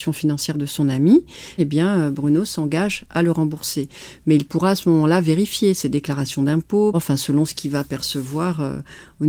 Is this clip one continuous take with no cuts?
no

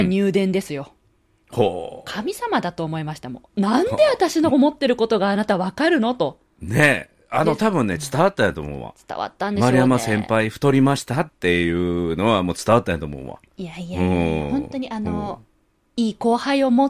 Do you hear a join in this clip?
no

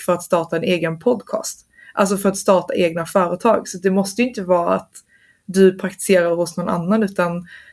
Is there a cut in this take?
no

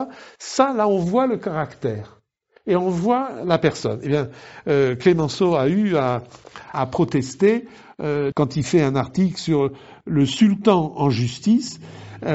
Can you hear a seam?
yes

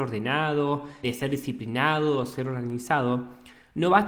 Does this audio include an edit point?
yes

